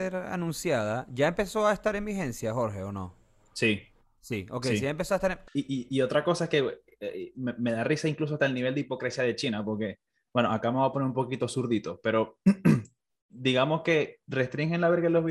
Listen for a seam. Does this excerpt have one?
yes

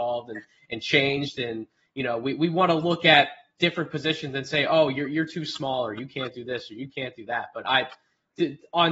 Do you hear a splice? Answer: no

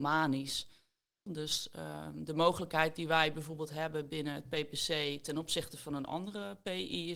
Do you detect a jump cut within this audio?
yes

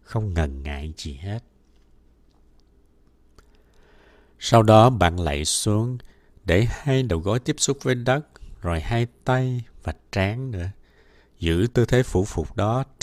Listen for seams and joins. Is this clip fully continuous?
yes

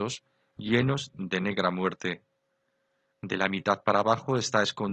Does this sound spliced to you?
no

